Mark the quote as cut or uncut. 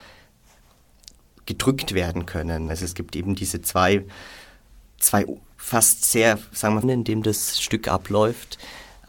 cut